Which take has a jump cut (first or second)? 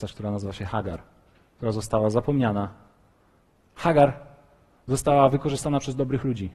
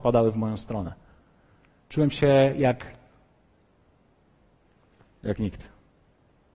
first